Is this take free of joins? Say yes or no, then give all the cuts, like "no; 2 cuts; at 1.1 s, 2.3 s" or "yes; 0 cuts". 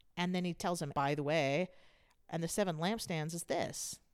no; 1 cut; at 0.9 s